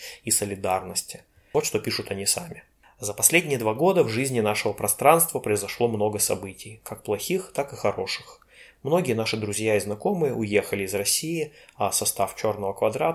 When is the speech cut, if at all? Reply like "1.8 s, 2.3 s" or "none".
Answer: none